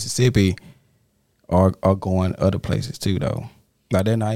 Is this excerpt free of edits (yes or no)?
yes